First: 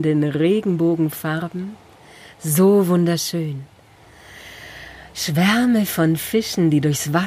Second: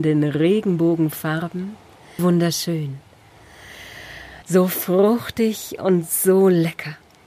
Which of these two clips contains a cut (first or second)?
second